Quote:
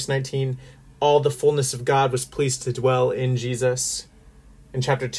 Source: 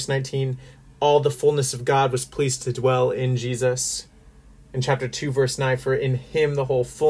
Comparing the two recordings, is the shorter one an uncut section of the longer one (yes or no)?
yes